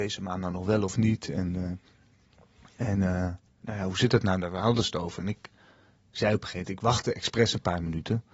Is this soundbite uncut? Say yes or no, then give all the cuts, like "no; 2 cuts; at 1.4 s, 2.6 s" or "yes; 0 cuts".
yes; 0 cuts